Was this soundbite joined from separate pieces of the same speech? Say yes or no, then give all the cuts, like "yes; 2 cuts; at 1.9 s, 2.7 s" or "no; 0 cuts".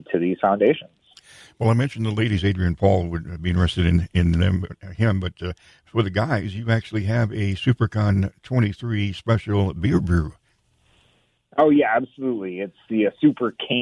no; 0 cuts